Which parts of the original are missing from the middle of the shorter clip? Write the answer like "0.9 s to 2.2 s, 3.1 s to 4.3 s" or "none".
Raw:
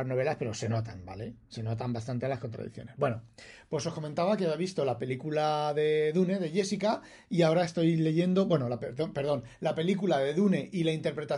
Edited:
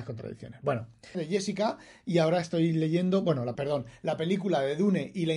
3.5 s to 6.4 s, 8.8 s to 9.1 s